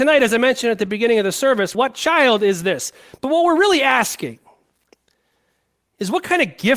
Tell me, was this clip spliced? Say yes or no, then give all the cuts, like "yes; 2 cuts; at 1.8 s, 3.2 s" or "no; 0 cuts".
yes; 1 cut; at 1.7 s